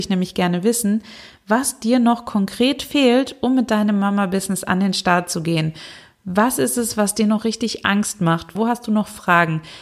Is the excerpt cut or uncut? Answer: cut